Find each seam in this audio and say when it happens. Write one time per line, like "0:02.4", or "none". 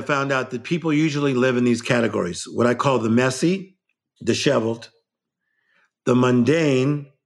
none